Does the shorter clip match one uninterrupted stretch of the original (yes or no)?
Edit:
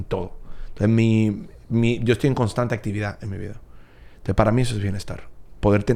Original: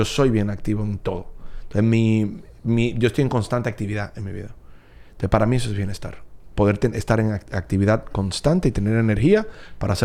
yes